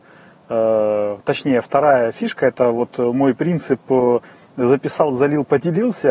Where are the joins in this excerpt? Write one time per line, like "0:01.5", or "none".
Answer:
none

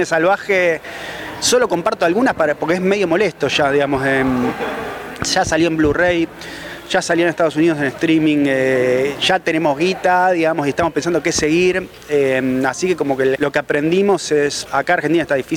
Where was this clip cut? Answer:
0:13.4
0:14.7

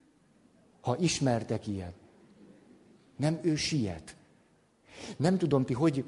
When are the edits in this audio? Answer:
0:03.1

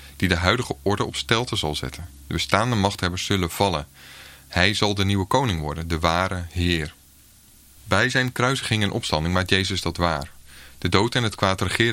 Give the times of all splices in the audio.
none

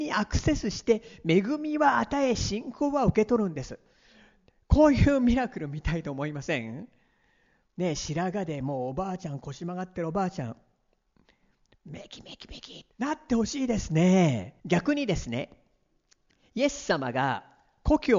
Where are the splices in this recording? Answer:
0:12.9
0:14.6

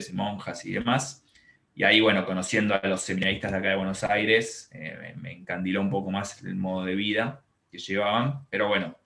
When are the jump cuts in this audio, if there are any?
none

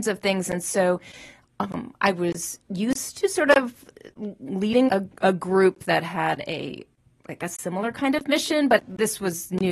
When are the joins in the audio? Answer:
0:04.9
0:08.8

